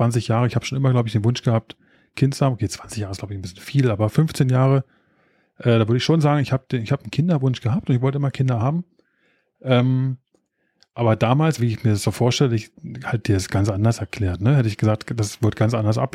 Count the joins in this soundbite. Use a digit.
1